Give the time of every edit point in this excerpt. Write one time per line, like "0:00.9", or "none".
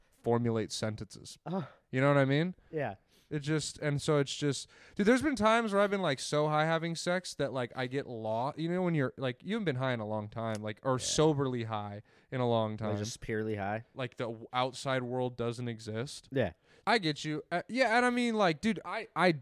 0:13.9
0:16.8